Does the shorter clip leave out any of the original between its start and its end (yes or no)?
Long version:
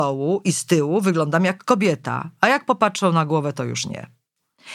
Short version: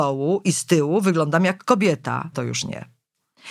yes